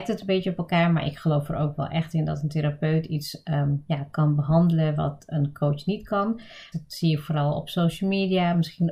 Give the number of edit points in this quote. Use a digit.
1